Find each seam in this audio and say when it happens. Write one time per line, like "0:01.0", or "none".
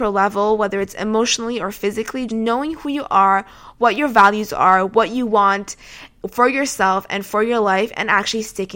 0:02.3